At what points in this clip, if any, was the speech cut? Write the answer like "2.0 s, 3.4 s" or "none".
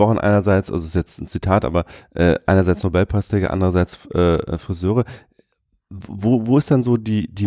none